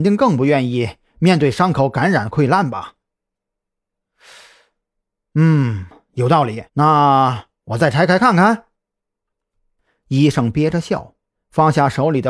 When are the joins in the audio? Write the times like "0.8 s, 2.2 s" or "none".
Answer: 6.7 s